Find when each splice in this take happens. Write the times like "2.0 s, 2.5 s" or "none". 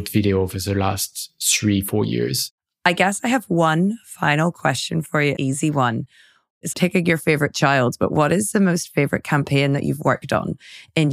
5.4 s, 6.7 s